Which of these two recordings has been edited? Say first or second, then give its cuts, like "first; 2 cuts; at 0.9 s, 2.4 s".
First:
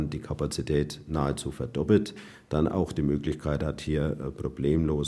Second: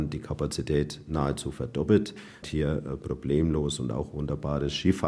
second; 1 cut; at 2.4 s